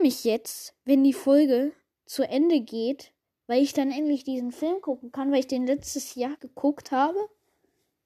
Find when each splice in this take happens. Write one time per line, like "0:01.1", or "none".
0:06.4